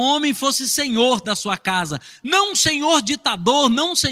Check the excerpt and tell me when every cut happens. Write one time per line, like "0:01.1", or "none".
none